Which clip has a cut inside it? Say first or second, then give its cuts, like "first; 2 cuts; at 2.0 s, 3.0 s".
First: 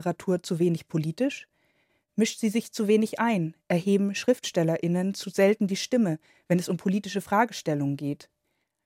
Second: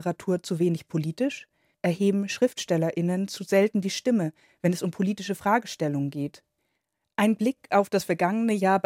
second; 1 cut; at 1.7 s